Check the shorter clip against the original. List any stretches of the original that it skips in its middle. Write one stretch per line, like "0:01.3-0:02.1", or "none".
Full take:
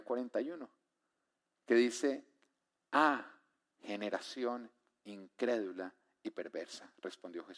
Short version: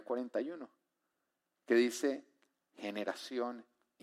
0:02.7-0:03.7